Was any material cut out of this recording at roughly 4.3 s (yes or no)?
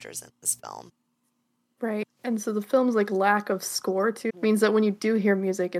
yes